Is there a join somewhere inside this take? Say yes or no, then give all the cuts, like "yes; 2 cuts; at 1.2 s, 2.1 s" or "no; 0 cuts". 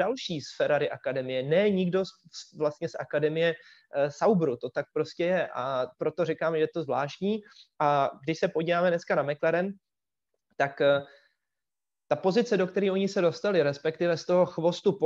no; 0 cuts